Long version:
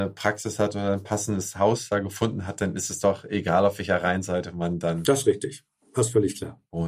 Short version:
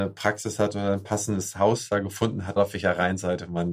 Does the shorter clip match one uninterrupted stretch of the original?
no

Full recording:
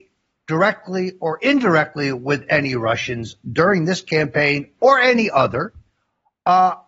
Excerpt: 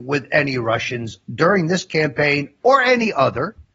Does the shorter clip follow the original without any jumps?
yes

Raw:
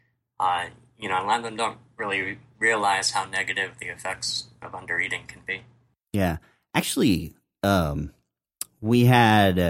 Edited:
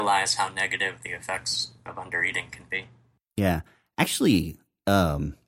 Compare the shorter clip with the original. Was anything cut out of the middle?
no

